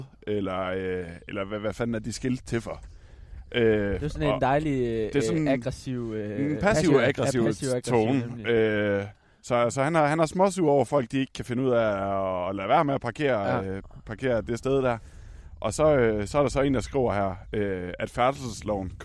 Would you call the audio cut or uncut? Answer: uncut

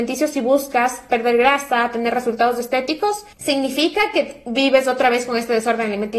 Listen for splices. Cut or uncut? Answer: cut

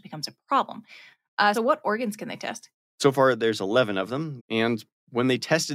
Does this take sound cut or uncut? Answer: cut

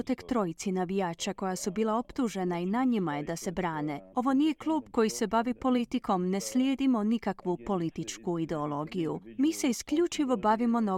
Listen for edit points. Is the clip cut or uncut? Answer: cut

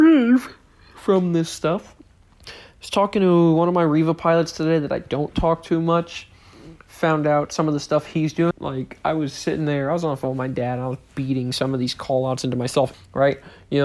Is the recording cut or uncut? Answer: cut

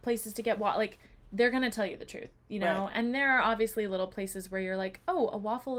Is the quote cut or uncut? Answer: uncut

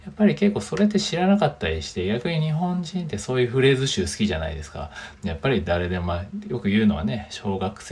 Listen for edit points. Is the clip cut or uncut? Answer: cut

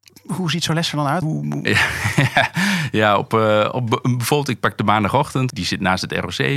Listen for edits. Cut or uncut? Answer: cut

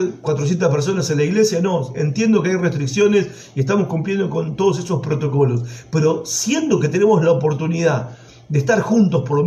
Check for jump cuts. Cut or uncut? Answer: uncut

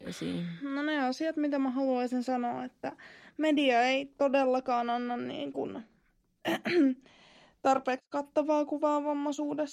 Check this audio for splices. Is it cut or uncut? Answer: uncut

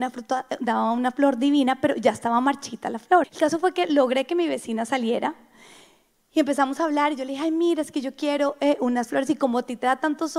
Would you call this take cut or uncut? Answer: cut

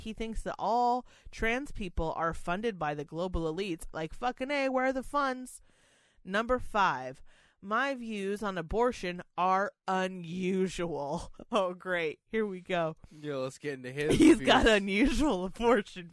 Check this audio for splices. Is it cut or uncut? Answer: cut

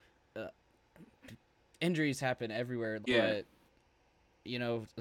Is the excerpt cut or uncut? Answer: cut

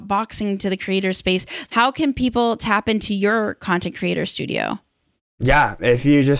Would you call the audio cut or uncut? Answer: uncut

